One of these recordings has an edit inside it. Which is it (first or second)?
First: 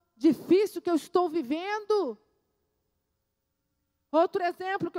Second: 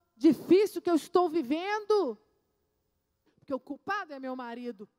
second